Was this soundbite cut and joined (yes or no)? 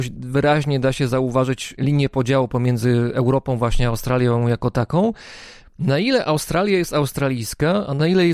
yes